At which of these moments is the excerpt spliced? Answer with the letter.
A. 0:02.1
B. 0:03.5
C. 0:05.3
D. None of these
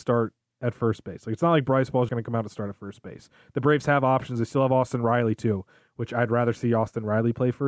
A